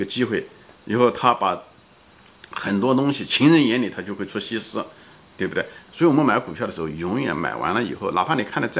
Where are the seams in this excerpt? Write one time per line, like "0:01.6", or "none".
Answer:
0:05.9